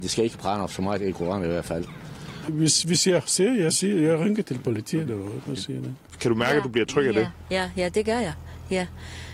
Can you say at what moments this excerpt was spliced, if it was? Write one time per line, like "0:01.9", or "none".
0:02.4